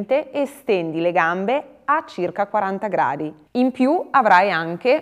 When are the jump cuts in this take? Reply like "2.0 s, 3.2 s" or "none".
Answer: 3.5 s